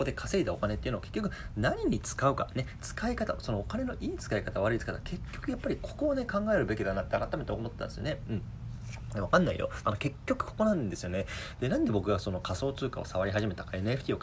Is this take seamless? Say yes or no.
no